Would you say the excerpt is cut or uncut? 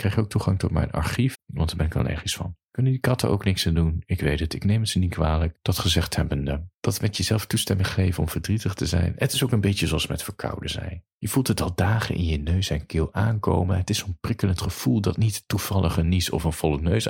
cut